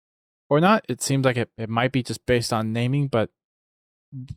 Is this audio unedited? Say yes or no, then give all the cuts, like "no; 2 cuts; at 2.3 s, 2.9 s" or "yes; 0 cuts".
yes; 0 cuts